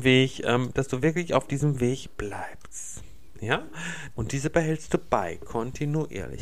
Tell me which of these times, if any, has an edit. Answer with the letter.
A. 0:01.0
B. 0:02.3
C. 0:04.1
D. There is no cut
C